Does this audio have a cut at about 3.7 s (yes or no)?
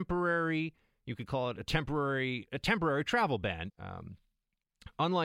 yes